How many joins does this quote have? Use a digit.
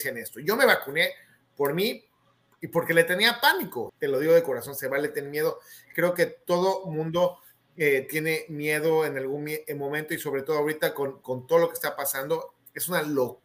1